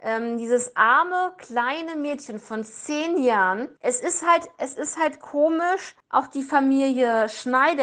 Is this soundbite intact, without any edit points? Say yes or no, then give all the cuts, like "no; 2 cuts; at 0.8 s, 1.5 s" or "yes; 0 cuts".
yes; 0 cuts